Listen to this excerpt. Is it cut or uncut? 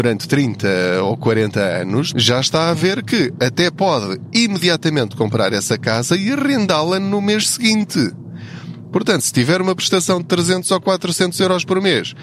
cut